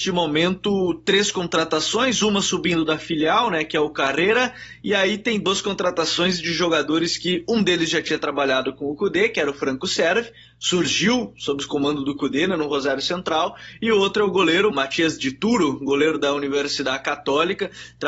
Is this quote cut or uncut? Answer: cut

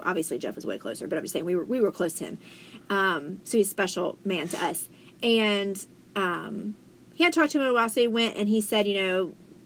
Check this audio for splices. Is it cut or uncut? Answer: uncut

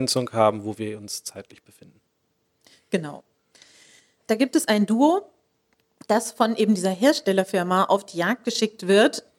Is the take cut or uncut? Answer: cut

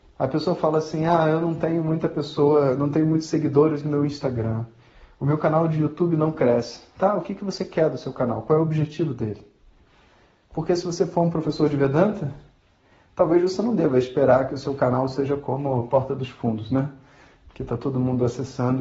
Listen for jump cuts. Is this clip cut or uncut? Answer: uncut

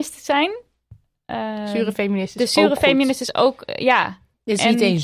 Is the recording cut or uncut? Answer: uncut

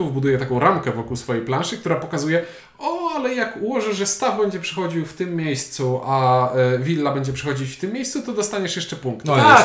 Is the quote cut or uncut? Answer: uncut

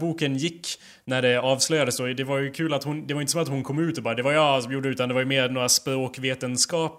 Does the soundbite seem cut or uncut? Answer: uncut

